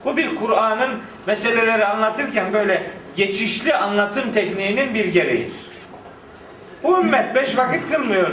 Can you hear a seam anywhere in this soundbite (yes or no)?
no